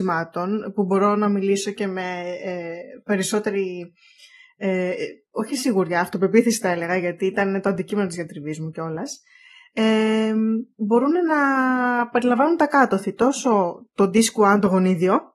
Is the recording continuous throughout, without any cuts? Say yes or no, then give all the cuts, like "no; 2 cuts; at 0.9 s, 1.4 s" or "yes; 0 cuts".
yes; 0 cuts